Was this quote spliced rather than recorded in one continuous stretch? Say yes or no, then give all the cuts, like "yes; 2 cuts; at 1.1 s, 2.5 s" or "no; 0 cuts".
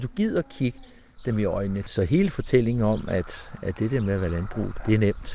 yes; 1 cut; at 1.8 s